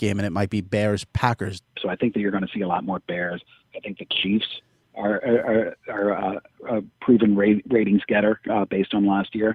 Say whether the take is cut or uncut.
cut